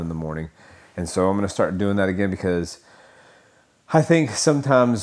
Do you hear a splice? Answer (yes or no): no